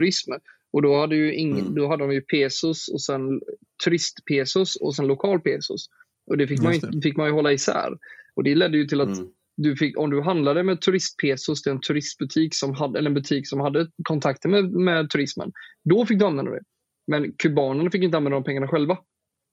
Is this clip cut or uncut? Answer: cut